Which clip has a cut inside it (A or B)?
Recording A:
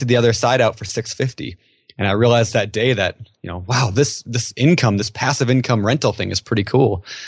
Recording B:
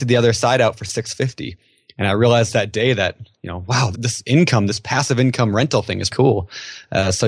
B